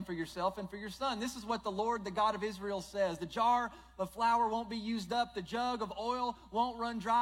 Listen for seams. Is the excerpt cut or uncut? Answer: uncut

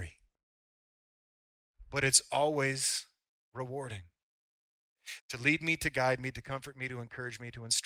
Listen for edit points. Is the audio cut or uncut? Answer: cut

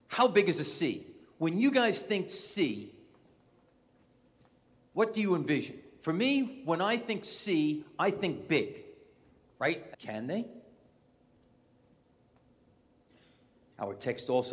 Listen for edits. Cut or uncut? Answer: cut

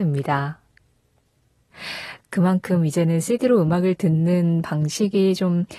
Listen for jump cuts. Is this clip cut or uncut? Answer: cut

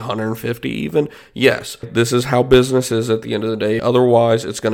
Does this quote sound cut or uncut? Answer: cut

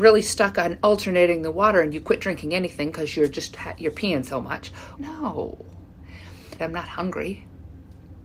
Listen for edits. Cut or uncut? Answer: cut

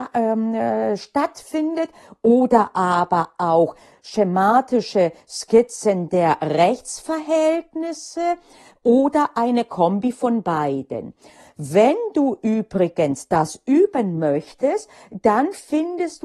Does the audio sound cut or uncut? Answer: uncut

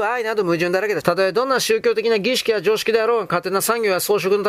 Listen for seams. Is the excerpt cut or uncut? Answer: cut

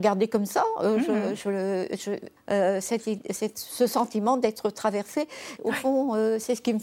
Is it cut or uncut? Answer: cut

